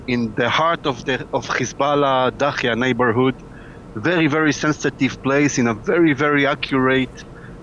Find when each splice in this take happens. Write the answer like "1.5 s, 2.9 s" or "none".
none

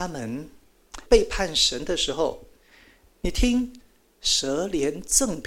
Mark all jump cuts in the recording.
1.1 s

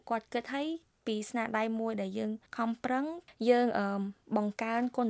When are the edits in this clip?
2.5 s

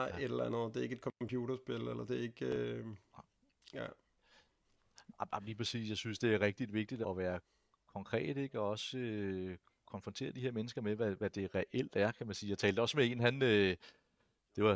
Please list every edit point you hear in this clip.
7.0 s

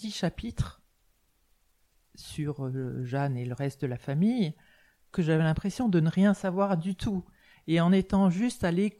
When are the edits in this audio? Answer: 5.1 s

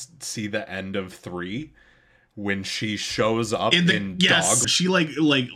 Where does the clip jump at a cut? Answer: 4.6 s

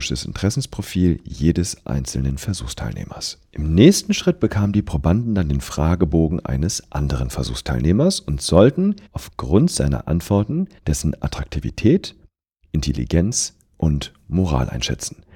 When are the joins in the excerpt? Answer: 9.1 s, 10.8 s

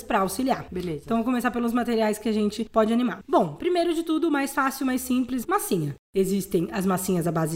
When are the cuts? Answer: 5.4 s

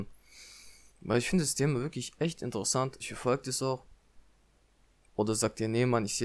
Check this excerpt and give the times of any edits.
3.0 s, 5.0 s

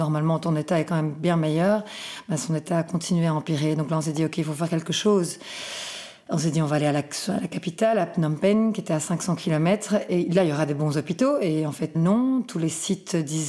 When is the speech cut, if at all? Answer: 11.9 s

